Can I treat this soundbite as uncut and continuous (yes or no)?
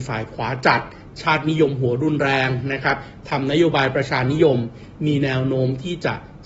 yes